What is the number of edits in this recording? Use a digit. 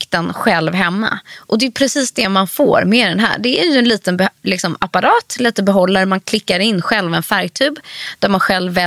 0